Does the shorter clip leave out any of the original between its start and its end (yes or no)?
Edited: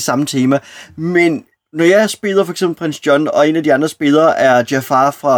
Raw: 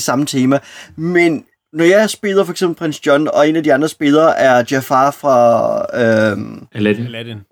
no